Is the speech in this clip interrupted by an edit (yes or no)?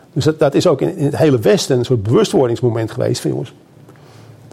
no